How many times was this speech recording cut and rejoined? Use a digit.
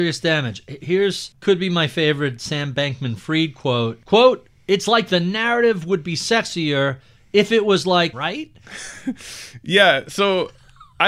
1